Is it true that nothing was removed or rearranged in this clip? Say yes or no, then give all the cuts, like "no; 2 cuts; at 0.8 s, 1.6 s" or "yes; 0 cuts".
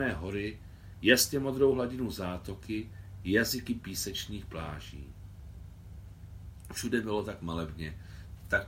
no; 1 cut; at 0.9 s